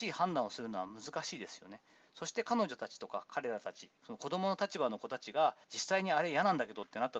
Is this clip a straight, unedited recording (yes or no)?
no